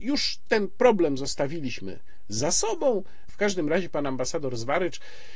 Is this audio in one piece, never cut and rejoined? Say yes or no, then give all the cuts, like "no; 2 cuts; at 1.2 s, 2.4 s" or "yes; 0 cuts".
no; 1 cut; at 3.3 s